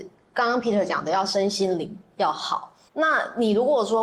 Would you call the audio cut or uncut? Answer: cut